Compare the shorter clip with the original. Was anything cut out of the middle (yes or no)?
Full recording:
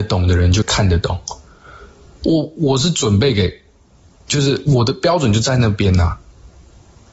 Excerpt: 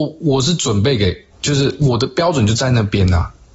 yes